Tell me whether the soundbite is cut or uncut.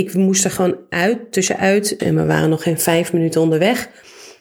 cut